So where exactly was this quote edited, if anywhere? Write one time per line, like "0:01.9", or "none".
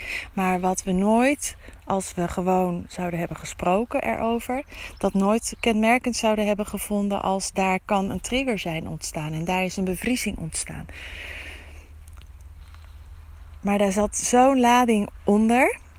none